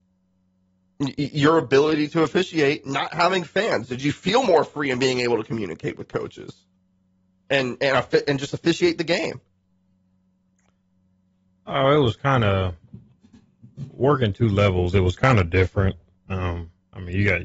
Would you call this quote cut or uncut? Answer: uncut